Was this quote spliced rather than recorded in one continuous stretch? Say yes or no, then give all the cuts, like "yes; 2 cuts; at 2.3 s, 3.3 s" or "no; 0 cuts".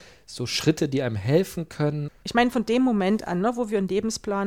yes; 1 cut; at 2.1 s